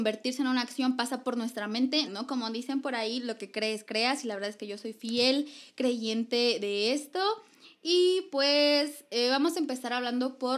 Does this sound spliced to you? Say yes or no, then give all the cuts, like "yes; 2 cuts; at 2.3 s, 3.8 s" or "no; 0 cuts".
yes; 1 cut; at 2.0 s